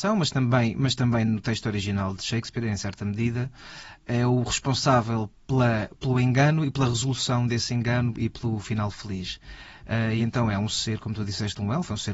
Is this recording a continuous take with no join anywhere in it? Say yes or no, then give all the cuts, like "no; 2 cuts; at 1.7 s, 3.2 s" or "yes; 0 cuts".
yes; 0 cuts